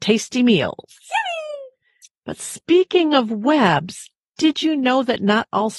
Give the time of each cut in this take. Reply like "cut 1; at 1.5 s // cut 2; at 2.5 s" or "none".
none